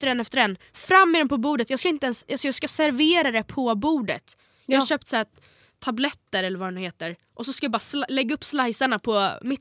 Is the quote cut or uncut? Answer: uncut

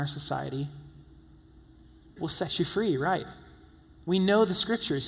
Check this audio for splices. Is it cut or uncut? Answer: cut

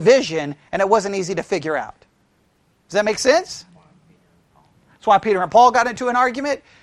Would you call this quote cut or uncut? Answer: uncut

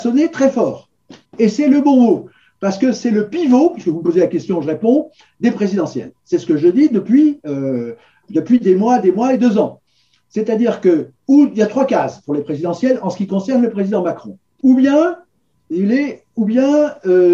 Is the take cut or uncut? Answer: cut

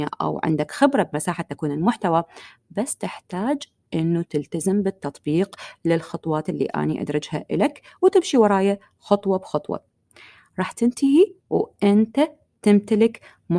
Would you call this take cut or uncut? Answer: cut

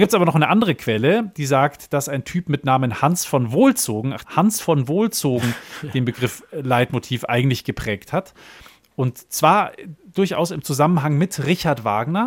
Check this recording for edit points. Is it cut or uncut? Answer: cut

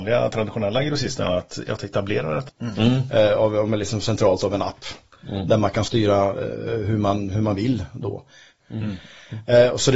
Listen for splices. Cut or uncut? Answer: cut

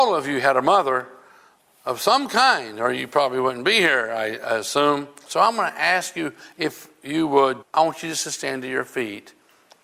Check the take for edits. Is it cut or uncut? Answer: cut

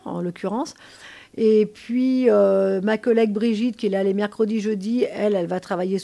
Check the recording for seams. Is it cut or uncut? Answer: uncut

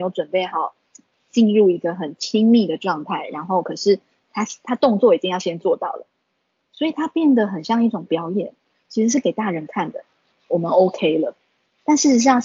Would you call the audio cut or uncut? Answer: cut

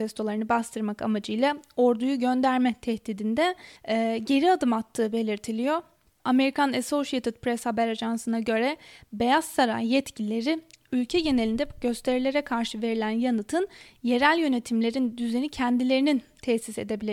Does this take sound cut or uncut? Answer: cut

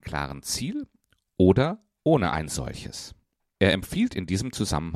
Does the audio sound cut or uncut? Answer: uncut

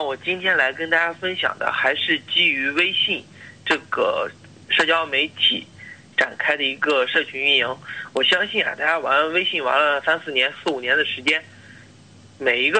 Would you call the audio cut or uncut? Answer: uncut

